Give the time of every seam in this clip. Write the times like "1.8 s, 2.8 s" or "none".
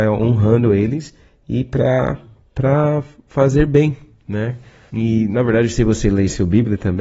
4.9 s